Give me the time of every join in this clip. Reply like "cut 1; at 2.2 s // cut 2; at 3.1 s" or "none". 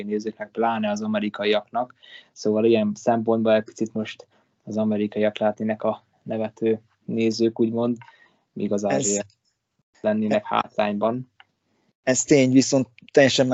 none